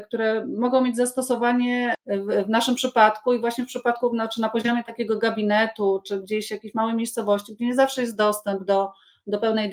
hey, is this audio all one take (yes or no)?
yes